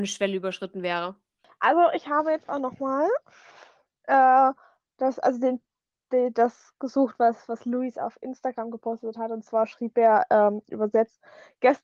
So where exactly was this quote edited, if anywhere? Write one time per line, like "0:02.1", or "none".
none